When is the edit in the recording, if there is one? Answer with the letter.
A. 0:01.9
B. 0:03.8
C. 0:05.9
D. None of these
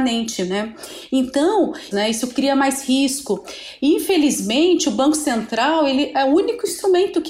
A